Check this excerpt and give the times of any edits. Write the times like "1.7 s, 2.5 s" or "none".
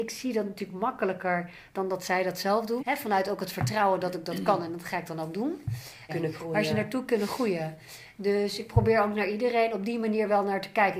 2.8 s, 6.1 s